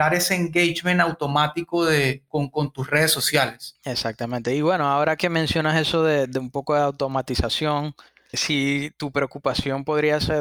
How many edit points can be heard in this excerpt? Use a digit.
0